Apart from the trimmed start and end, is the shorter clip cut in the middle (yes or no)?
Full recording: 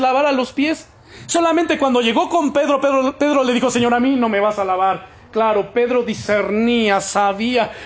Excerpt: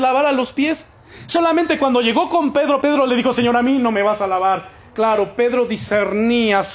yes